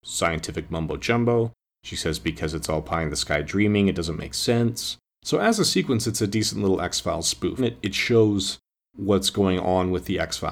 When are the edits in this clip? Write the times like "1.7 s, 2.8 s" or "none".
5.2 s, 7.6 s